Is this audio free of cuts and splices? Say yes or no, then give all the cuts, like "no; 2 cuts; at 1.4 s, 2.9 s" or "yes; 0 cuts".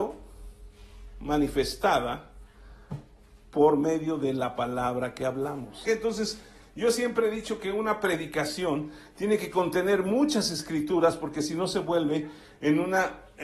no; 1 cut; at 5.8 s